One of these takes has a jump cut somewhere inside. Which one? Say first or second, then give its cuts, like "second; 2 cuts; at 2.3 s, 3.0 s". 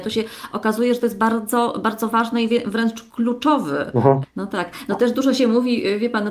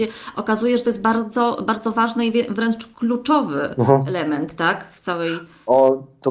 first; 1 cut; at 4.2 s